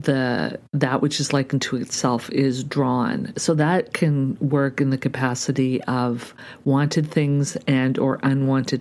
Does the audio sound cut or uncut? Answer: uncut